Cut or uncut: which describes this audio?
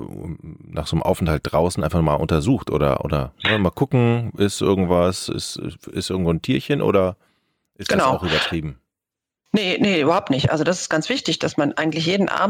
uncut